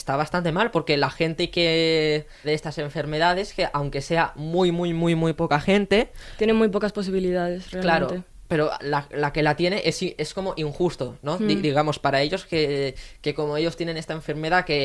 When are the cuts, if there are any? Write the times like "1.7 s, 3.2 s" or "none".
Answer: 2.4 s

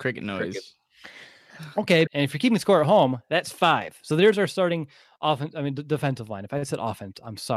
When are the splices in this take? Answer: 2.1 s

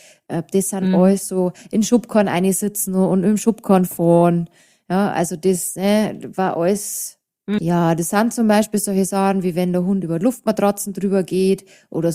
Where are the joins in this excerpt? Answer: 7.6 s

